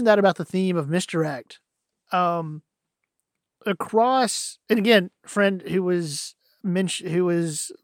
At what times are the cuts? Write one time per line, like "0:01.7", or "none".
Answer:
none